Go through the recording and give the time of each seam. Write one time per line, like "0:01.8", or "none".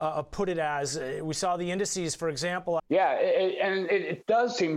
0:02.8